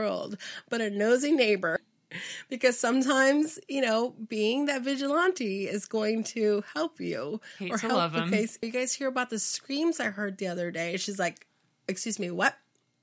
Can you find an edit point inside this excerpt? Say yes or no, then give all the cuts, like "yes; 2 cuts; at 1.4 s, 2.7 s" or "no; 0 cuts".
yes; 2 cuts; at 1.8 s, 8.6 s